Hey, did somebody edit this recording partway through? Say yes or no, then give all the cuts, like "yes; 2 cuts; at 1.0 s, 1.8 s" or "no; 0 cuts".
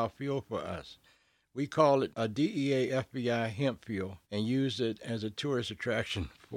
yes; 2 cuts; at 2.1 s, 4.2 s